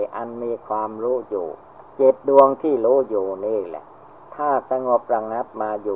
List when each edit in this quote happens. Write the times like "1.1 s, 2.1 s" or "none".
1.9 s